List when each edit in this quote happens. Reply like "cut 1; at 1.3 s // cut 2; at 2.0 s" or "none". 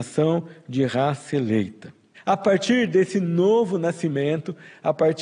cut 1; at 2.1 s